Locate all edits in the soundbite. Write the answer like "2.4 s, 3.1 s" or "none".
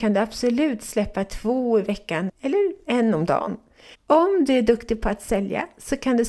2.3 s, 3.9 s